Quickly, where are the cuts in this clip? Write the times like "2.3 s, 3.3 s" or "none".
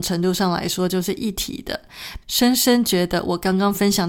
2.2 s